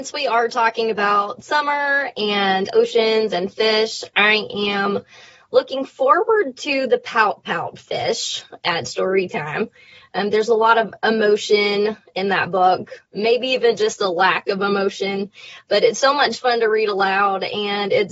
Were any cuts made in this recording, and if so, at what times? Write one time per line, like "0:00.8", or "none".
0:13.1

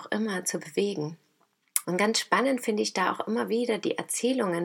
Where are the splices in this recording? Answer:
0:01.8

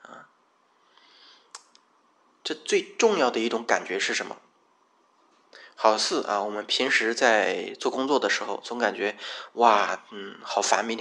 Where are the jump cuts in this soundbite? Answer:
none

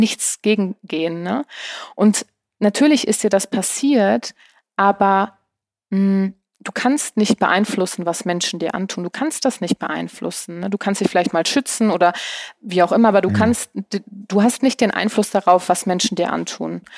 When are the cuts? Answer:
none

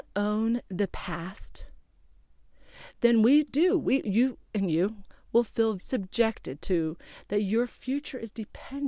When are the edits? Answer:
0:05.8

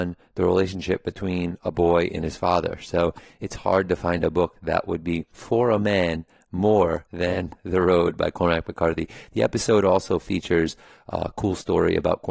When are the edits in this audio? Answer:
none

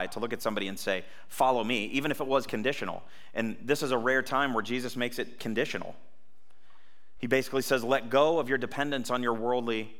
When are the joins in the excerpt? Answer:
none

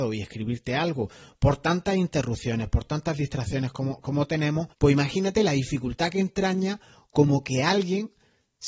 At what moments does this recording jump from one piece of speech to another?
0:04.7

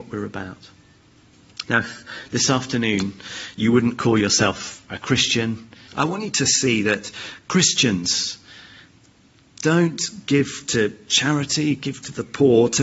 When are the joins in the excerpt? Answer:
0:01.6
0:05.9

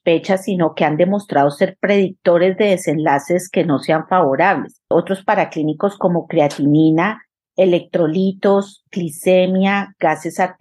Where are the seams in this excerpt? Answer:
0:04.8
0:07.4

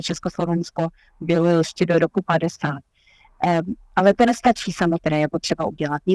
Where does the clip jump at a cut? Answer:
0:05.0

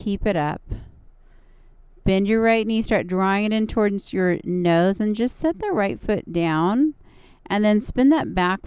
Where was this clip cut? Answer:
none

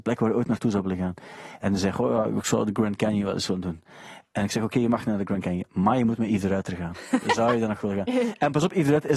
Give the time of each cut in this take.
none

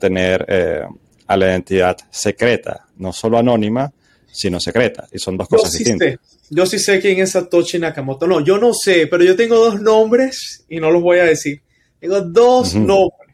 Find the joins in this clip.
none

